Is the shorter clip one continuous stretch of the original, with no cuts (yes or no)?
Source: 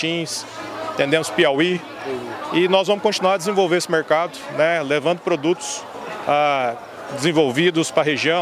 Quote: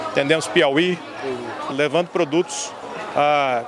no